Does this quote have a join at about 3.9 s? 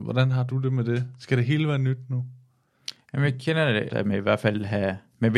yes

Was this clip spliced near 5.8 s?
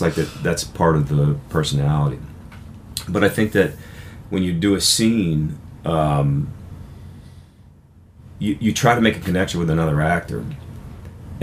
no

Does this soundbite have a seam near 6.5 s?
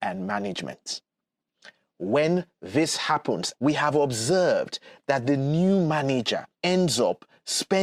yes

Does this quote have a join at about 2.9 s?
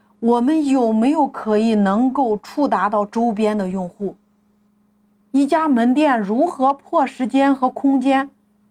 no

